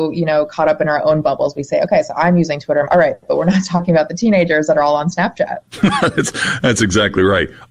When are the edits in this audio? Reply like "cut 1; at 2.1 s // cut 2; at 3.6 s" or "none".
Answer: cut 1; at 2.9 s